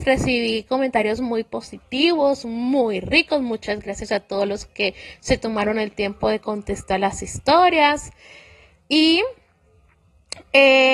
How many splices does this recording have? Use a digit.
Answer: 0